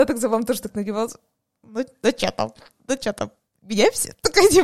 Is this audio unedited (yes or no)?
yes